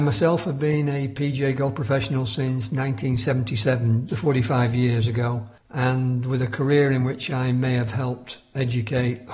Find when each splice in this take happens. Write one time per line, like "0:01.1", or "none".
0:04.1
0:05.6